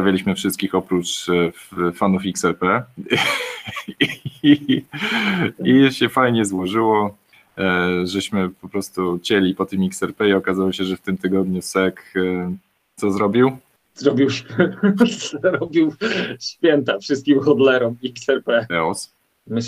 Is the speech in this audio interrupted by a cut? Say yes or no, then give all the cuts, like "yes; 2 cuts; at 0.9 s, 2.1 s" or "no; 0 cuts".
yes; 1 cut; at 18.7 s